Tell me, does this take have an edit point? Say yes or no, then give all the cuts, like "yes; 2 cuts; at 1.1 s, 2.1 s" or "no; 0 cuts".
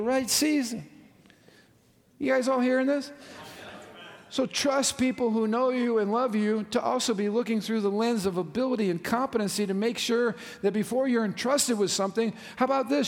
no; 0 cuts